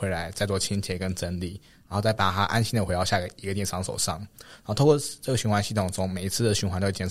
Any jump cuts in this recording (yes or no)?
no